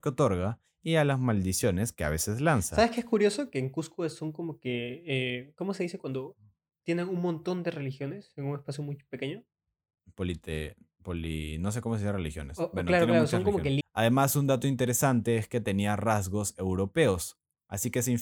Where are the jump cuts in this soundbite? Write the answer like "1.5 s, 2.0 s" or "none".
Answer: 13.8 s